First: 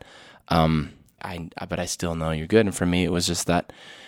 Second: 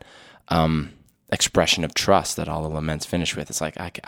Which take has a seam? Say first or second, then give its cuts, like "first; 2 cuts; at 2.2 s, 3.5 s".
first; 1 cut; at 1.2 s